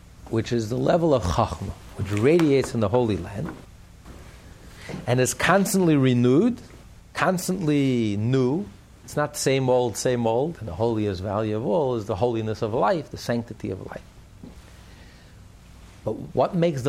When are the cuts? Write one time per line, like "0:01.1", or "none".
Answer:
0:08.9
0:10.6